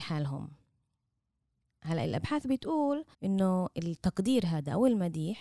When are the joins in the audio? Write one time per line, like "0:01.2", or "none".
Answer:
0:03.1